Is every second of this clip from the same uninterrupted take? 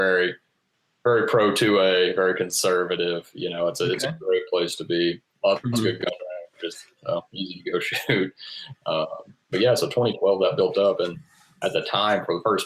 yes; 0 cuts

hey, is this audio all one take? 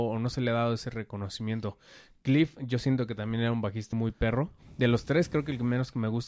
no; 1 cut; at 3.9 s

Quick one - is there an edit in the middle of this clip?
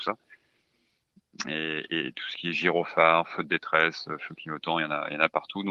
no; 0 cuts

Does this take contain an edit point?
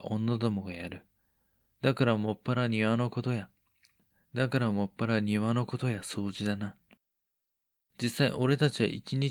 no; 0 cuts

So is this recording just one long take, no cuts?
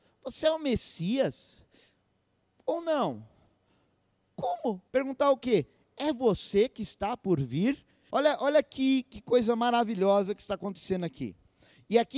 no; 2 cuts; at 4.9 s, 8.1 s

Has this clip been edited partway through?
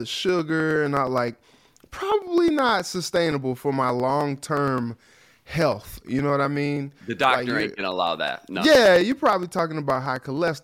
no; 0 cuts

